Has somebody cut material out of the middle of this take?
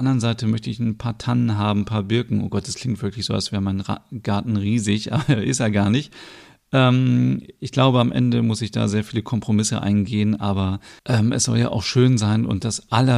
yes; 1 cut; at 11.0 s

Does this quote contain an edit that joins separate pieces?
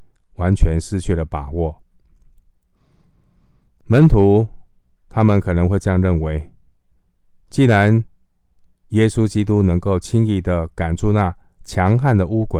yes; 1 cut; at 3.8 s

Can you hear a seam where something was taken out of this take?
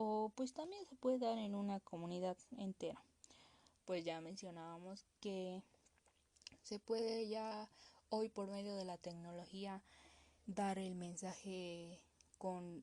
yes; 3 cuts; at 3.8 s, 5.1 s, 10.4 s

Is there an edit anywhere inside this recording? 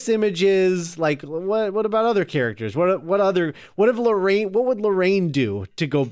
no; 0 cuts

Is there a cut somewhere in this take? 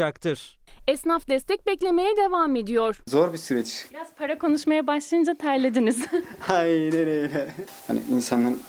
yes; 1 cut; at 3.9 s

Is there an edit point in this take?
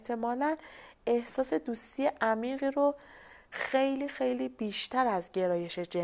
no; 0 cuts

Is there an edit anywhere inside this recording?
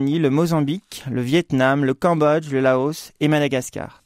no; 0 cuts

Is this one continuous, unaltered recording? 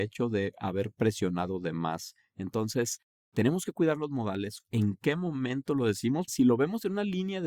no; 2 cuts; at 4.6 s, 6.3 s

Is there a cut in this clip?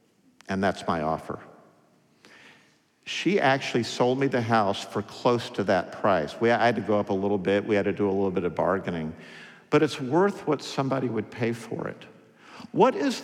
no; 0 cuts

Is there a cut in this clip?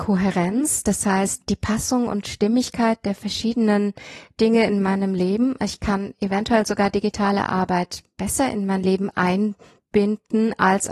no; 0 cuts

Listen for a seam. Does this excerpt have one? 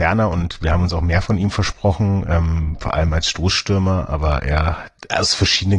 no; 0 cuts

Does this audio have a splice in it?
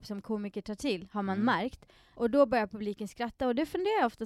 yes; 1 cut; at 2.1 s

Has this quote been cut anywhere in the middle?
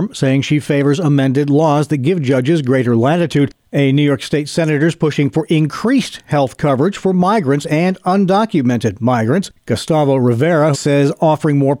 yes; 1 cut; at 10.7 s

